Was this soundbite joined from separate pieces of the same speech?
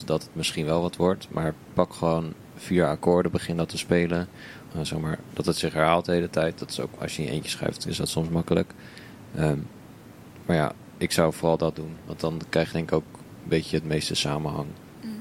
yes; 1 cut; at 4.7 s

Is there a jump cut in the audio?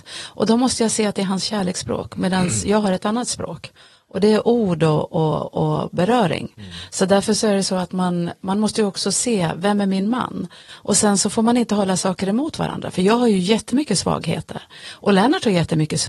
no; 0 cuts

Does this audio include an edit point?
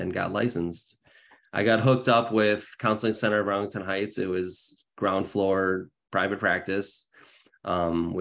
no; 0 cuts

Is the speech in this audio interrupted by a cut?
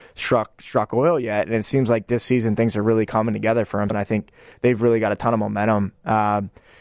yes; 1 cut; at 3.9 s

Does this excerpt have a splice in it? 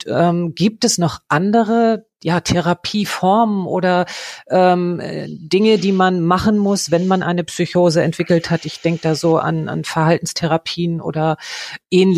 no; 0 cuts

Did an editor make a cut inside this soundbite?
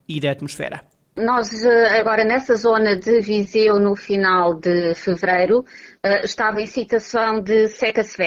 no; 0 cuts

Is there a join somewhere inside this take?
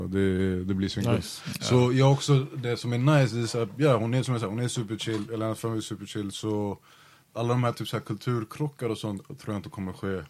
no; 0 cuts

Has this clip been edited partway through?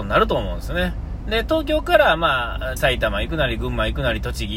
yes; 2 cuts; at 1.2 s, 2.8 s

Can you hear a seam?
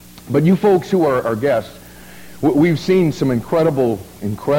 no; 0 cuts

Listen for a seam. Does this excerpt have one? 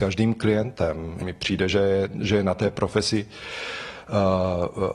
yes; 1 cut; at 1.2 s

